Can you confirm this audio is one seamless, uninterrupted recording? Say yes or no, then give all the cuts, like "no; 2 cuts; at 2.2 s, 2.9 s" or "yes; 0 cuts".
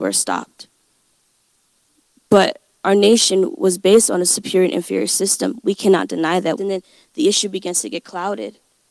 no; 1 cut; at 6.6 s